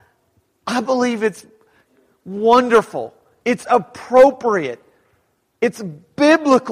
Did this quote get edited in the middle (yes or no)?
no